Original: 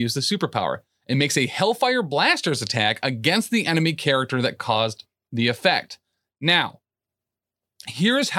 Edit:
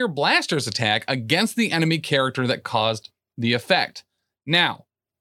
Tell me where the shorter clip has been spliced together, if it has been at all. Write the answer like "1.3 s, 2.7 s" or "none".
none